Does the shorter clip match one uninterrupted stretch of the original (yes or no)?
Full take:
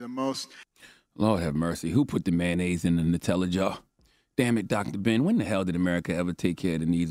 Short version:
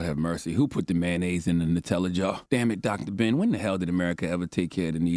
no